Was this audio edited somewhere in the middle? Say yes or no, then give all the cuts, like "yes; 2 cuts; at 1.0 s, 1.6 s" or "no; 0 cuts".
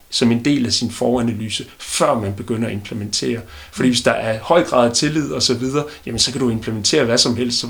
no; 0 cuts